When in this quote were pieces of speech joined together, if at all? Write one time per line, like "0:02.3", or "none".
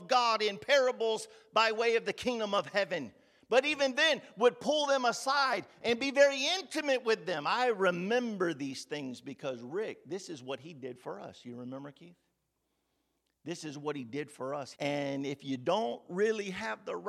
0:14.7